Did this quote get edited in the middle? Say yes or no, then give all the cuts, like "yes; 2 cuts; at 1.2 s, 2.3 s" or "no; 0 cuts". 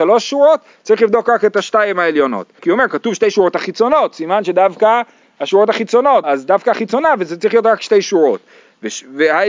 yes; 2 cuts; at 2.6 s, 6.2 s